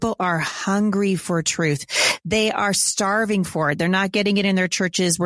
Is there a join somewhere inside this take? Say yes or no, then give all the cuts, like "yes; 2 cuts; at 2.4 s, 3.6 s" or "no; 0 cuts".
no; 0 cuts